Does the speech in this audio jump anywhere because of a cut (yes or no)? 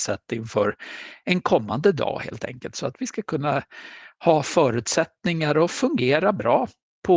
no